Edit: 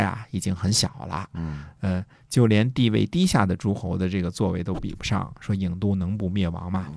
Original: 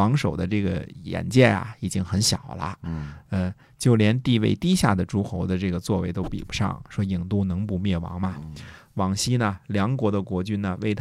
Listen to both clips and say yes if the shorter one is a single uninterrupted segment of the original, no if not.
yes